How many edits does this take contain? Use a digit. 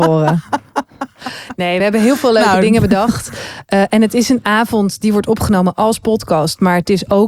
0